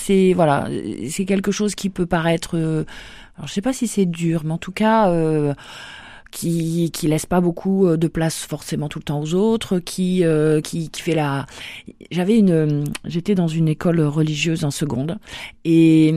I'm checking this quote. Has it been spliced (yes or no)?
yes